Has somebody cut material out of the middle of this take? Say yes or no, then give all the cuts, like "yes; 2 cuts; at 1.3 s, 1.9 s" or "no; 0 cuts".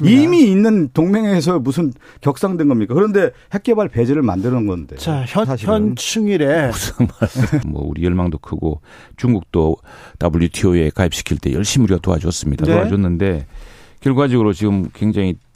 yes; 2 cuts; at 5.4 s, 7.6 s